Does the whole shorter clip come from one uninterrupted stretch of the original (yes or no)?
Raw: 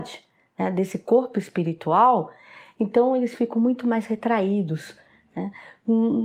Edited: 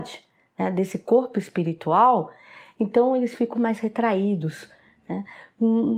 no